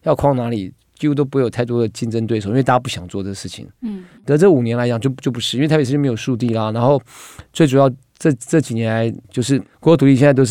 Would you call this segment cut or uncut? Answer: cut